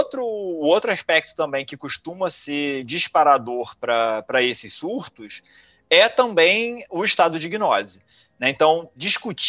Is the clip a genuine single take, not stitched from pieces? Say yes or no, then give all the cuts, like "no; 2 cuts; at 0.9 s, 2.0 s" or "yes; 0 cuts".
yes; 0 cuts